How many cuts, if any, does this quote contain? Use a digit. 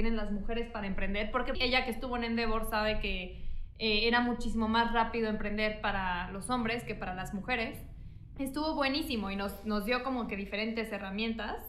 2